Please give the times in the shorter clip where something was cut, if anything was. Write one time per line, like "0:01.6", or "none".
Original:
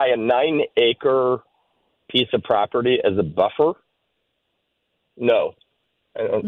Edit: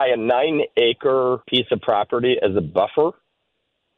0:01.4